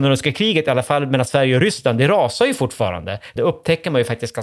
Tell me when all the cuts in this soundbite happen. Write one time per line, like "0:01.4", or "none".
0:03.4